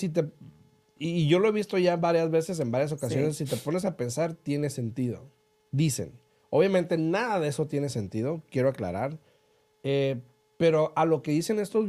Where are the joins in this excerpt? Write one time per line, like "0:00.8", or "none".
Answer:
none